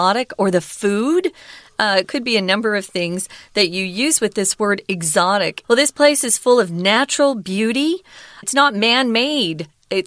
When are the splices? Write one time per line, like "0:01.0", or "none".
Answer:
0:05.6
0:08.4